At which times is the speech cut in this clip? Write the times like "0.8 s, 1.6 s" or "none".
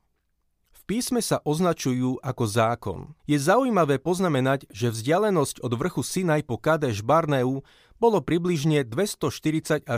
3.2 s